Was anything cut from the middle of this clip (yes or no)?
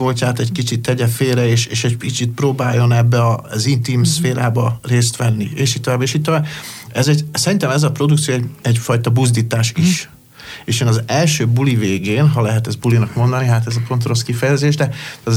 no